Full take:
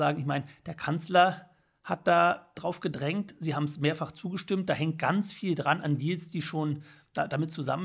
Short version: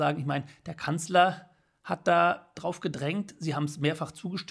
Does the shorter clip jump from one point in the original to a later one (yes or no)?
no